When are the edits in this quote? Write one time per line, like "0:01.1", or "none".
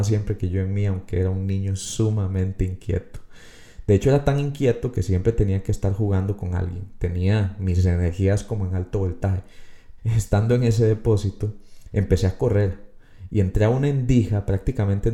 0:10.0
0:11.9